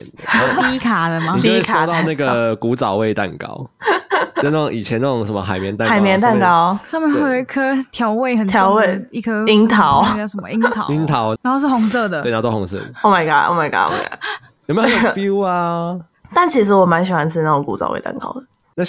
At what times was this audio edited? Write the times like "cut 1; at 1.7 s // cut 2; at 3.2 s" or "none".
cut 1; at 11.4 s